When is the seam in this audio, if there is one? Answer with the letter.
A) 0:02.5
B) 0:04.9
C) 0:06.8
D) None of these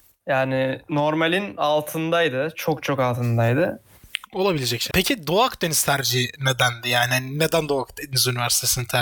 B